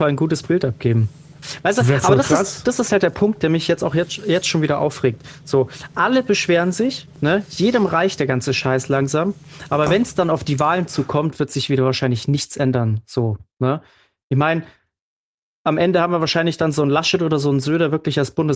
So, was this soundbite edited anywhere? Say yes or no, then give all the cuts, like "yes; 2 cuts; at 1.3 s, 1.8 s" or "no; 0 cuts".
no; 0 cuts